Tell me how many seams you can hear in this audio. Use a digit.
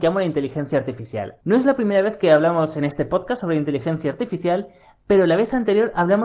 1